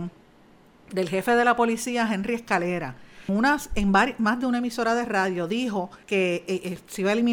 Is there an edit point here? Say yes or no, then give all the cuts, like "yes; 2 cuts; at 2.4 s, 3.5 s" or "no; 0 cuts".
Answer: yes; 2 cuts; at 3.3 s, 6.0 s